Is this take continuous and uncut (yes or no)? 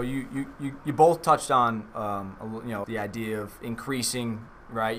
no